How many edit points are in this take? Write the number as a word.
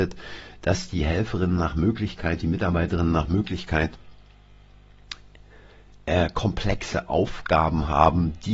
zero